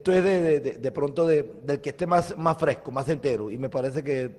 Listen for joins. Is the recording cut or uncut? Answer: uncut